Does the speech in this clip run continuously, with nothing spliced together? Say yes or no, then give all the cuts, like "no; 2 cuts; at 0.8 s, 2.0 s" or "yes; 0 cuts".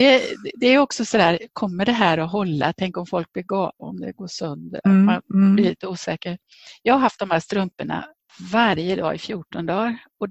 no; 1 cut; at 4.8 s